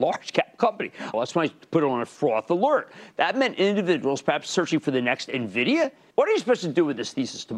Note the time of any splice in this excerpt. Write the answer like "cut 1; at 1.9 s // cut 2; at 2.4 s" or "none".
cut 1; at 1.1 s // cut 2; at 6.1 s